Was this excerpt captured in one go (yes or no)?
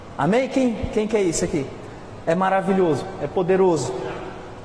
no